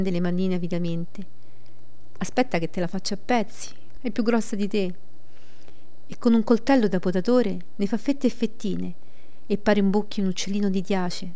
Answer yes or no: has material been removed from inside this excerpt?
yes